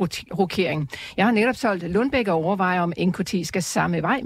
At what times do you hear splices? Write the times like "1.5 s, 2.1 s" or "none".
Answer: none

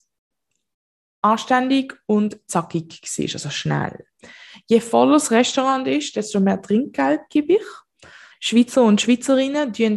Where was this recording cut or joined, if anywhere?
8.3 s

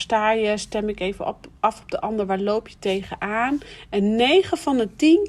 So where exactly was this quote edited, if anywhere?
none

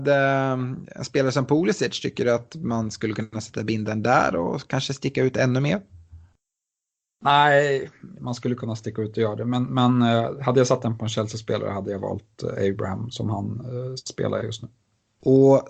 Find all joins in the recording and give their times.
8.2 s

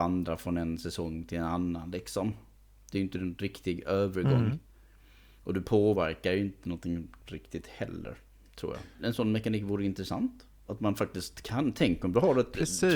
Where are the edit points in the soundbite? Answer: none

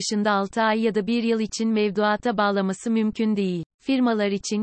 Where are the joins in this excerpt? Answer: 3.7 s

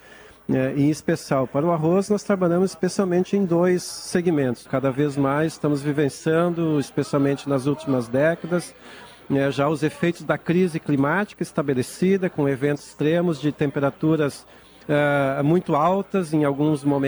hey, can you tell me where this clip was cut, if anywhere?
4.6 s

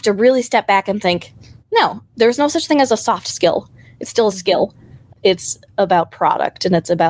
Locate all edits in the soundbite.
2.1 s, 5.1 s

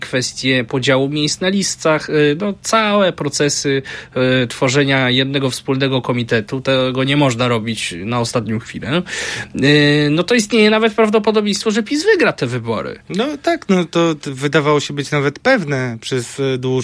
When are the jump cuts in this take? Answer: none

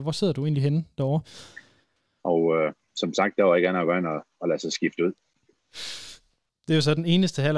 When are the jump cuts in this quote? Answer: 2.2 s

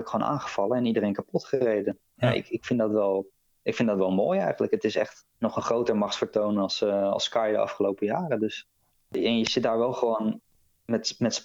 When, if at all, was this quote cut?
5.3 s

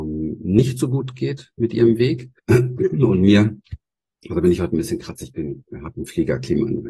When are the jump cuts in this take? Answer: 2.4 s, 5.9 s

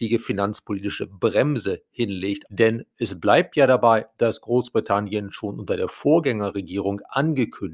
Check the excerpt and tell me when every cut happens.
2.4 s

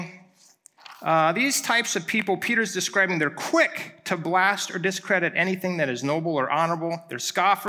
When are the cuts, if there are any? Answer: none

